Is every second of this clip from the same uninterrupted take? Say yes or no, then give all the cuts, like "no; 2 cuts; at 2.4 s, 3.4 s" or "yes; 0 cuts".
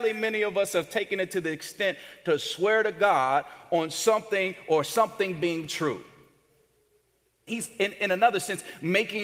no; 1 cut; at 7.5 s